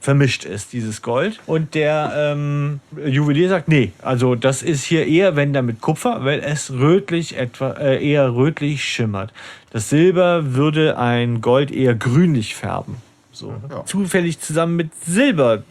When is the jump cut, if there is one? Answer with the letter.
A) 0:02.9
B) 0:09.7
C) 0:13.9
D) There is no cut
C